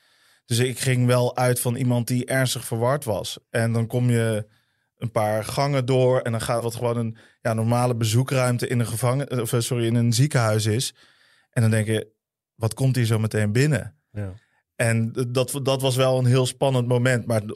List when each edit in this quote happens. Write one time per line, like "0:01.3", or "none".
0:06.6